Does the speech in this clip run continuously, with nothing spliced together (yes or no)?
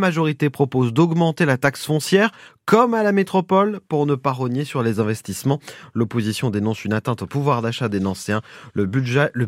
yes